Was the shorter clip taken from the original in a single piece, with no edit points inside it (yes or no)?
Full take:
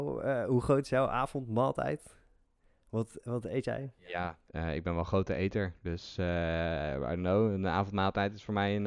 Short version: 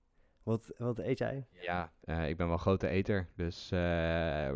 yes